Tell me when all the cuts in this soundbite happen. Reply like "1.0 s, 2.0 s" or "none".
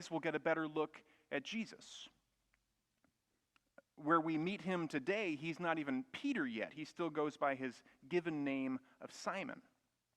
none